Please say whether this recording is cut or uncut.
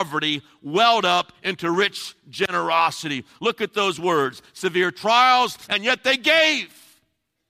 cut